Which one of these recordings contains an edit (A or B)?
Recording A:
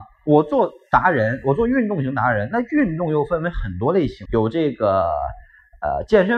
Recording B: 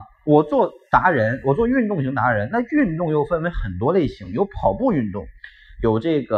A